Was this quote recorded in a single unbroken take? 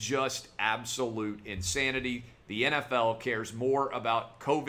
yes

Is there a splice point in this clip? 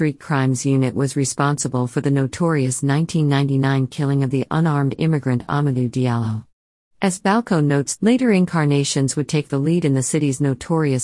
yes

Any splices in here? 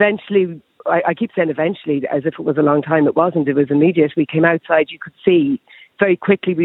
no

